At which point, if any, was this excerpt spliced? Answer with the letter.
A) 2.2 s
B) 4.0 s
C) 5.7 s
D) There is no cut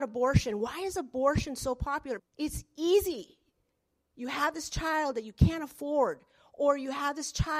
A